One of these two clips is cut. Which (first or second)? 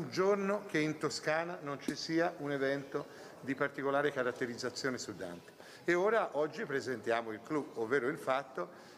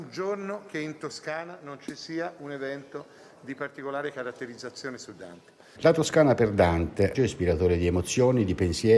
second